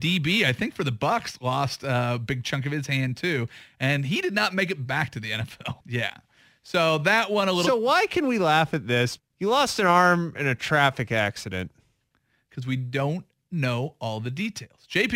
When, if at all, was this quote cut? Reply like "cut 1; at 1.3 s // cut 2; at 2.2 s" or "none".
cut 1; at 5.8 s // cut 2; at 9.2 s